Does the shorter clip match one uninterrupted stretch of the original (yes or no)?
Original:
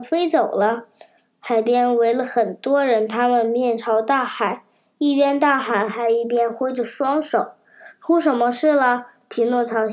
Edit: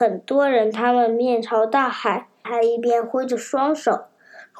no